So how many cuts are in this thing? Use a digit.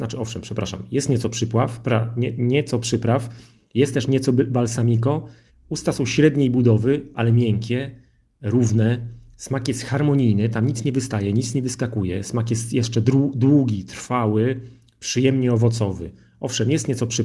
1